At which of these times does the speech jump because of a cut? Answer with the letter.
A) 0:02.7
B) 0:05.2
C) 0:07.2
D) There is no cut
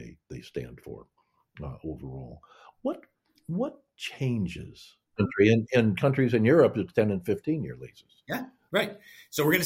B